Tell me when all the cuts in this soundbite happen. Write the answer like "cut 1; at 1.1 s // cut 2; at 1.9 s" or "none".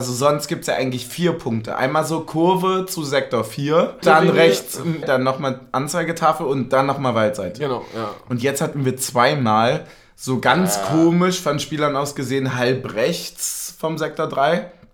cut 1; at 4.0 s // cut 2; at 5.0 s